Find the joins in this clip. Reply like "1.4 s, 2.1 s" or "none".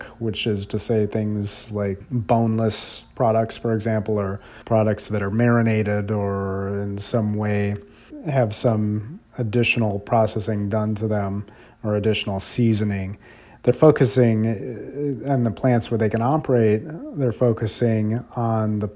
4.6 s